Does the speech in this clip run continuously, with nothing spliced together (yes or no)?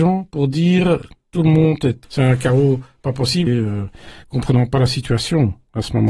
no